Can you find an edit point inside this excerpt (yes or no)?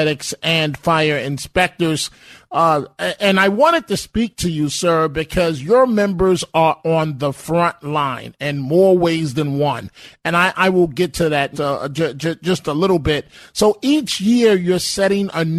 yes